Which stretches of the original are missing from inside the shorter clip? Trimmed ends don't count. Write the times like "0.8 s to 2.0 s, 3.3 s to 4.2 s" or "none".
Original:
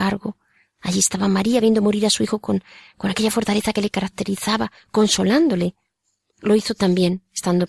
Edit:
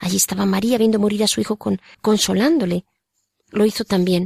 2.8 s to 4.8 s